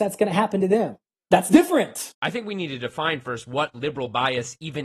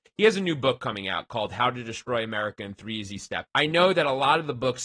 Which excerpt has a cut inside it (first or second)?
second